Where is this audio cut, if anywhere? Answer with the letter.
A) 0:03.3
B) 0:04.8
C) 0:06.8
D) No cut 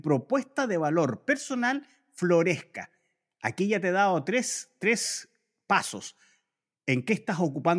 D